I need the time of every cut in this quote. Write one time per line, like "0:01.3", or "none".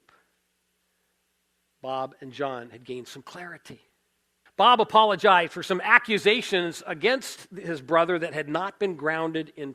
0:04.5